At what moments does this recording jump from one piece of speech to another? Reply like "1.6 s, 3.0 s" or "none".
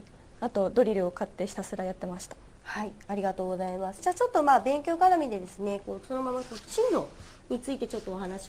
2.6 s